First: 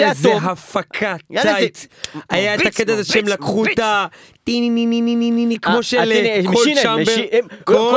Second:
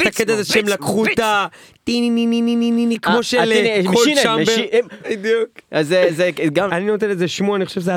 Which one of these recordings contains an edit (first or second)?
second